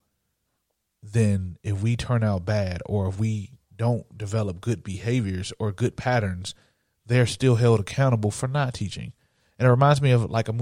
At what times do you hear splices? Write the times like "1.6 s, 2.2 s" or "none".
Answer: none